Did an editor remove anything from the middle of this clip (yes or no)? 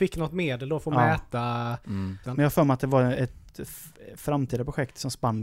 yes